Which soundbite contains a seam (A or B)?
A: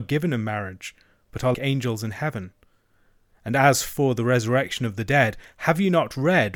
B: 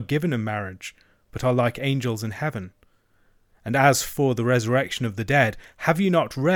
A